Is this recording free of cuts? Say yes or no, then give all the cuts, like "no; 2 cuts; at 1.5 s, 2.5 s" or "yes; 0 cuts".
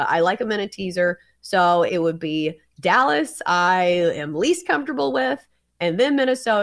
no; 1 cut; at 1.9 s